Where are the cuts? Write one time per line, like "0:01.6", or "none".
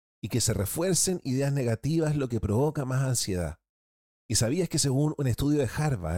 0:04.1